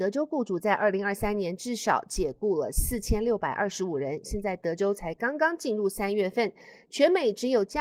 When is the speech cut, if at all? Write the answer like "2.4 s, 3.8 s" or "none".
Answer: none